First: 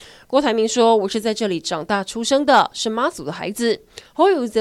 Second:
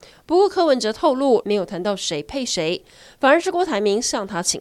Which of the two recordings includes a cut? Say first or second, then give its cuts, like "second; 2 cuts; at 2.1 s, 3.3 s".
second; 1 cut; at 1.4 s